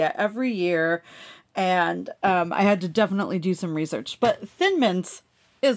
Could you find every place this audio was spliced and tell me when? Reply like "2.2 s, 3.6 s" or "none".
none